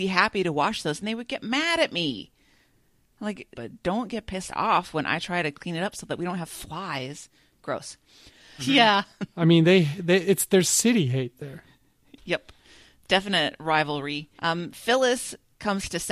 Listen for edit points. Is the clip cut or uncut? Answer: cut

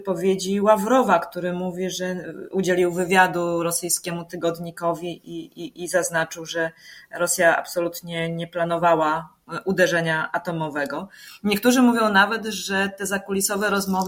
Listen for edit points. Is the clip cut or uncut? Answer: uncut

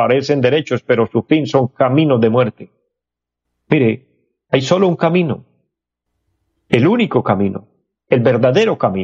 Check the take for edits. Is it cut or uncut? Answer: uncut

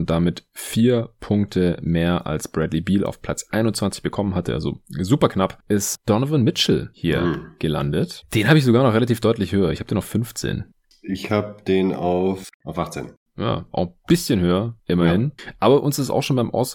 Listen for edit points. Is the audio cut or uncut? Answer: uncut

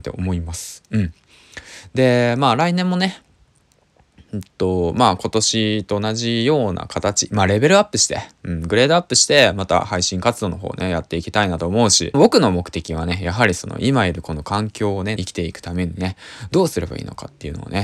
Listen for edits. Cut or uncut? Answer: cut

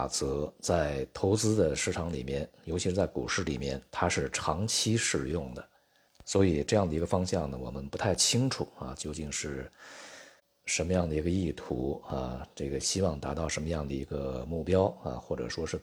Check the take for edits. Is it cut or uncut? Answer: uncut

